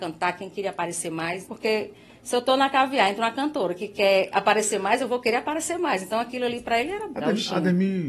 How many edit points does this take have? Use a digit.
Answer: 2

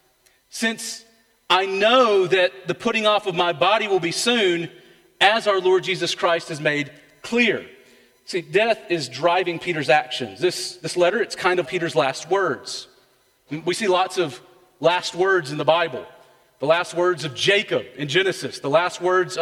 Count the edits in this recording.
1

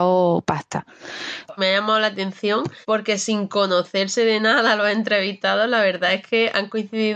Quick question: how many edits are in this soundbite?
2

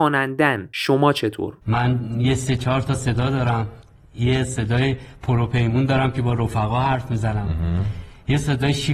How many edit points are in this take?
1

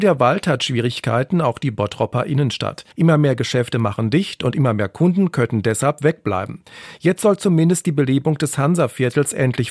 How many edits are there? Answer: 1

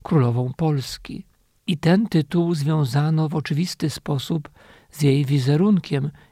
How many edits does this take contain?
1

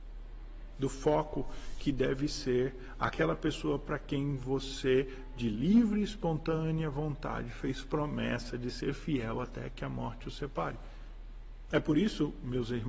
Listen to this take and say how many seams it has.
1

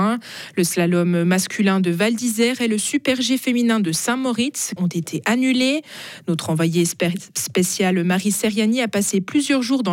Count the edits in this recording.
1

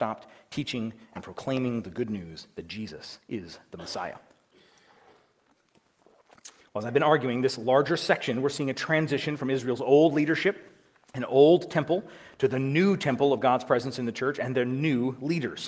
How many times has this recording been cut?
0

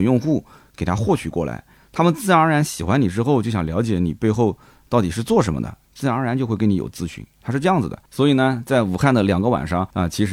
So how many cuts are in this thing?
1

